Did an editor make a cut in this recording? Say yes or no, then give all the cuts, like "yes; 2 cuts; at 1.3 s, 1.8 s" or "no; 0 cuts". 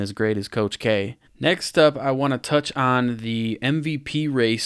yes; 1 cut; at 1.3 s